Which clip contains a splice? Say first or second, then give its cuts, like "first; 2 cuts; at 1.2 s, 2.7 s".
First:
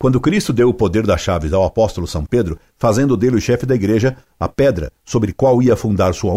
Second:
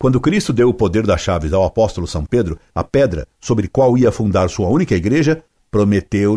second; 1 cut; at 2.7 s